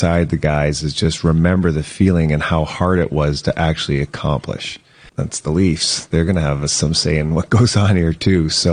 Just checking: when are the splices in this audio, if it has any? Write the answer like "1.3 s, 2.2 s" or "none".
5.1 s